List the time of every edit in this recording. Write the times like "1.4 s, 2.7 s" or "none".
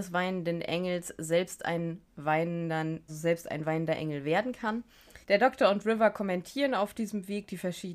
3.1 s, 5.2 s